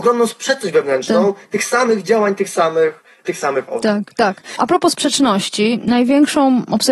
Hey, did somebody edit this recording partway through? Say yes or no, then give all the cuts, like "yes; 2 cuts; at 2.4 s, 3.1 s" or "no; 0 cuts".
no; 0 cuts